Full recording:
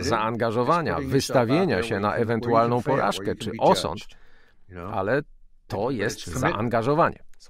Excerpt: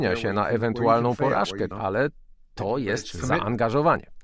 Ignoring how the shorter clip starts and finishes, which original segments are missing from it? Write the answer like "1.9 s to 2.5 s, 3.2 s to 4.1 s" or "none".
3.4 s to 4.8 s